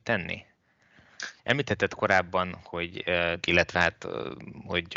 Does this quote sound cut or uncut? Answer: cut